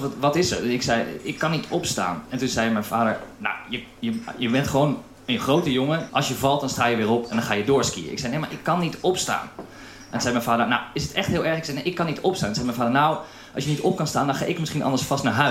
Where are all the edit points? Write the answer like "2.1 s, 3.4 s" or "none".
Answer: 6.1 s